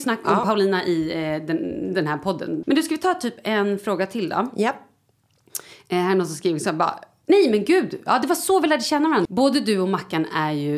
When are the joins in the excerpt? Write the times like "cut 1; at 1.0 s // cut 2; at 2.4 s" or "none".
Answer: cut 1; at 2.6 s // cut 2; at 9.3 s